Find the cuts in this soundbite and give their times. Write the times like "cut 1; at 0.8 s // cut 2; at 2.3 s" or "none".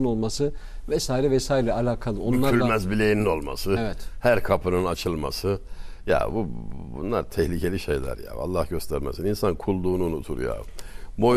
none